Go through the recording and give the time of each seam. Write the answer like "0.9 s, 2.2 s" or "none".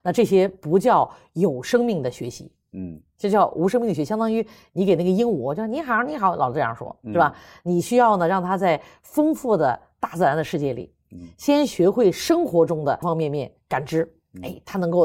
13.0 s